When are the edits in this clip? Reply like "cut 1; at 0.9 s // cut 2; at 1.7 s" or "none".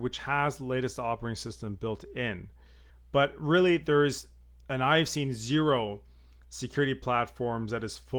cut 1; at 2.9 s